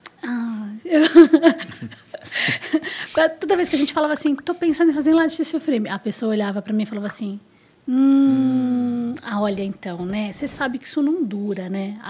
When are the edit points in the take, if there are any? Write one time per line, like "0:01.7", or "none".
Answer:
none